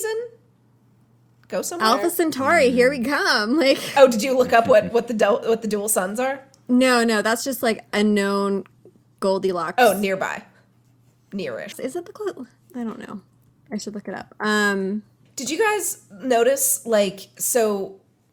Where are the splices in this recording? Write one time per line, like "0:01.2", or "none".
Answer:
0:11.7